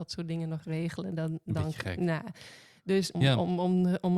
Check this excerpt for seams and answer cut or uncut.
cut